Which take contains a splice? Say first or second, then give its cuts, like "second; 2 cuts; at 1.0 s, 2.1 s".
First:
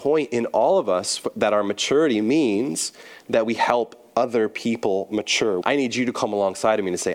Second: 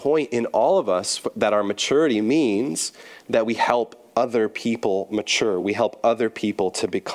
first; 1 cut; at 5.6 s